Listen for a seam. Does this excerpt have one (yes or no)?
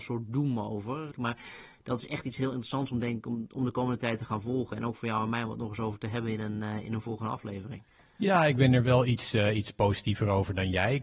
yes